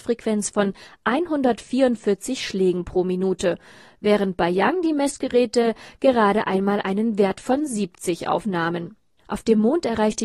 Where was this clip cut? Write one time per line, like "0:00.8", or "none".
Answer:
0:09.2

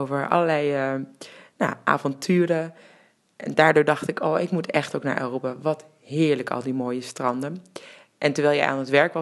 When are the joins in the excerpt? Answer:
none

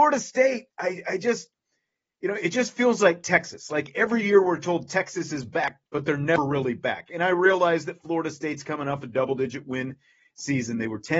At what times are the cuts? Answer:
none

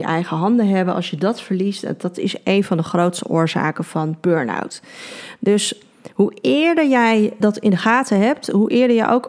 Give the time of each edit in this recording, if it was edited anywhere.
0:07.4

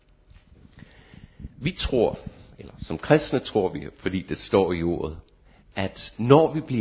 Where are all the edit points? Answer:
none

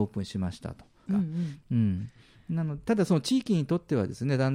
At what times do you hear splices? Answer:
0:01.1

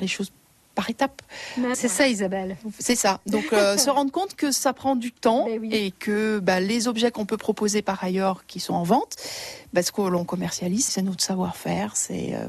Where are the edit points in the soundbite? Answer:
0:01.7
0:10.9

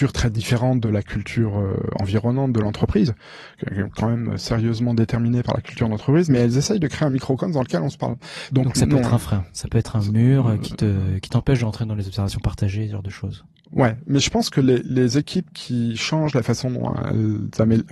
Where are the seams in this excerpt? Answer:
0:08.5

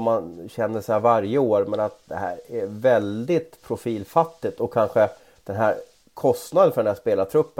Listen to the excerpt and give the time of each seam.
none

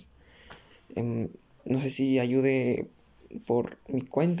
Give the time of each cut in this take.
none

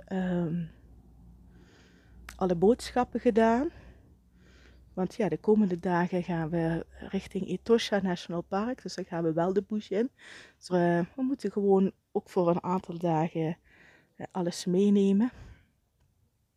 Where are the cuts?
0:10.7

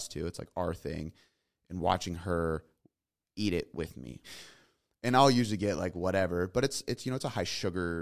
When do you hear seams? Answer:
0:04.2

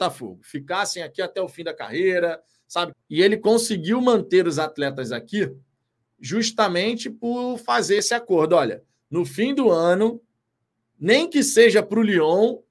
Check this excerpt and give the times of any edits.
0:02.9

